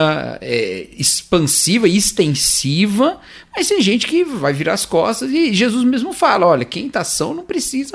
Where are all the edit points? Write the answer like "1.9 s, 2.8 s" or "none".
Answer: none